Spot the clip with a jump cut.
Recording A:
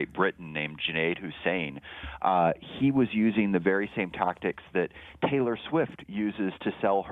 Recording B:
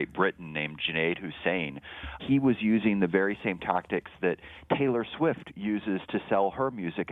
B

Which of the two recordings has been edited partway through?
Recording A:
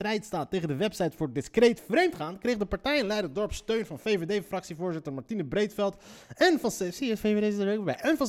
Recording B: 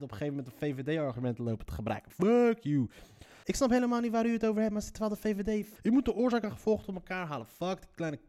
B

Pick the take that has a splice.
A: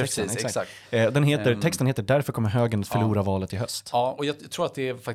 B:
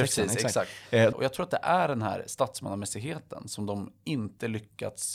B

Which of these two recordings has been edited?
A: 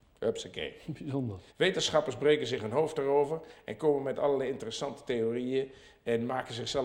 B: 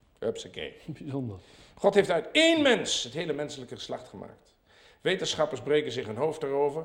A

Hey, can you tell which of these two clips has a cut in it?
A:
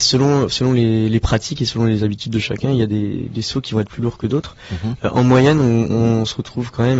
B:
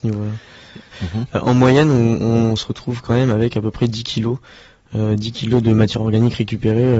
B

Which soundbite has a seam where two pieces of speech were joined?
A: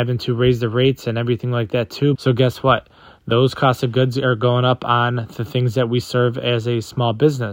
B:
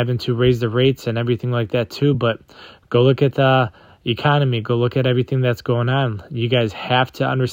A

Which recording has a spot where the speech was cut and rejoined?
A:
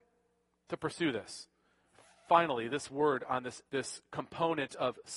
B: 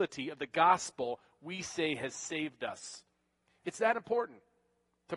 A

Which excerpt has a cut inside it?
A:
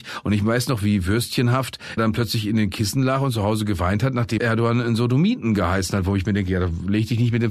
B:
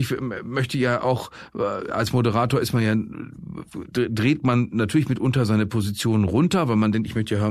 A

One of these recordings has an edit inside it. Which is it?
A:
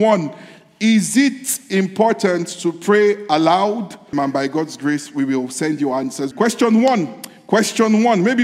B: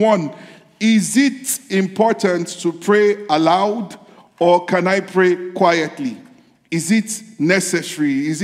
A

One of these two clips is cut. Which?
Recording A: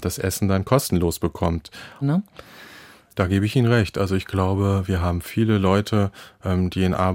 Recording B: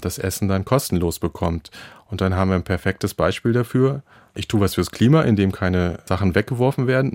A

